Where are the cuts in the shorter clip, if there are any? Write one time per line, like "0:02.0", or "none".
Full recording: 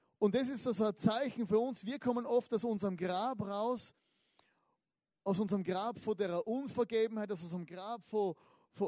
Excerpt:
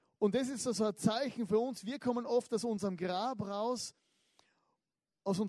none